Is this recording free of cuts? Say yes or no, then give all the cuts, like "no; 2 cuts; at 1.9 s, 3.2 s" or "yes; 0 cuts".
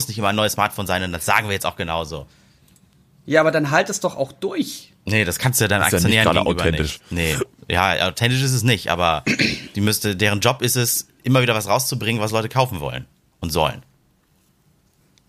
yes; 0 cuts